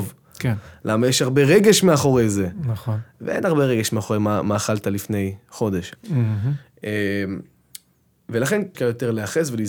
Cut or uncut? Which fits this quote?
cut